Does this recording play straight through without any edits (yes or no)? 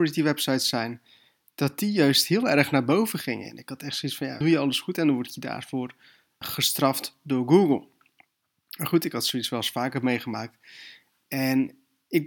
no